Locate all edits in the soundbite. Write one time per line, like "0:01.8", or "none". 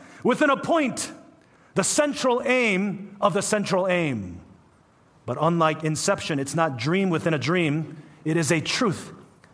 none